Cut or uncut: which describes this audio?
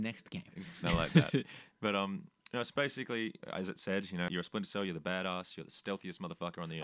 cut